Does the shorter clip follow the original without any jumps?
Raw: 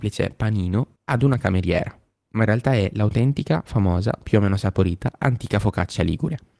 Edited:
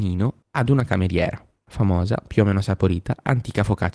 no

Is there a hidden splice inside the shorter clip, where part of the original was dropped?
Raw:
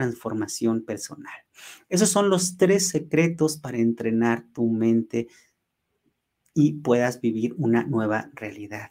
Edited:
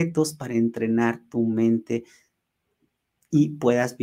no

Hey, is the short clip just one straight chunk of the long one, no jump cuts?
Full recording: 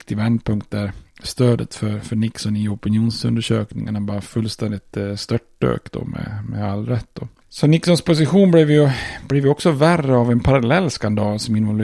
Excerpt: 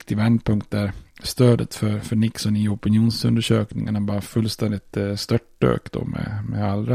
yes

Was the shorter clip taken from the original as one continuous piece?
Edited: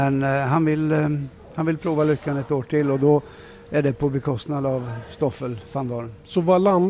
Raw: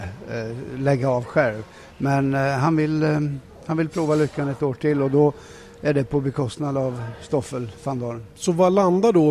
yes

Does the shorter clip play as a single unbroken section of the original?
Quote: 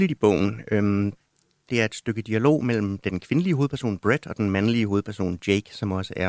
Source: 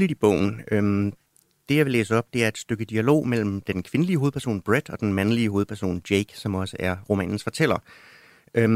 no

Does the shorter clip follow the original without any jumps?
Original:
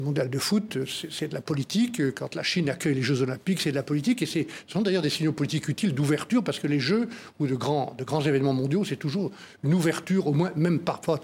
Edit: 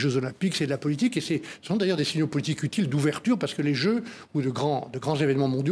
yes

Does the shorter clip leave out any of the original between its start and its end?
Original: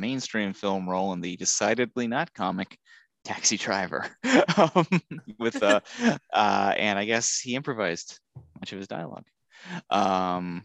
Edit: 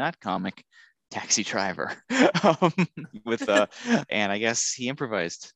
yes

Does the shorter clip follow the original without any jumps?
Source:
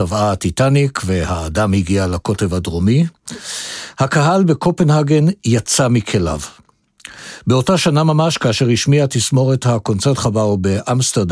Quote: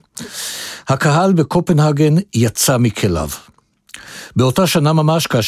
yes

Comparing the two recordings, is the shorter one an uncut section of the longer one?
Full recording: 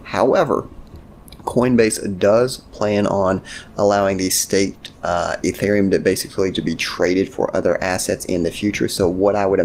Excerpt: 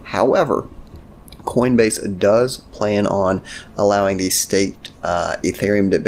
yes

